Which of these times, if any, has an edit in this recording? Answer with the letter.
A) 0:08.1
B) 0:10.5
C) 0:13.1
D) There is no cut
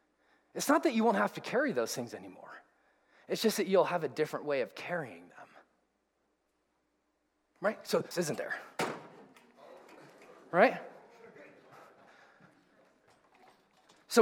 A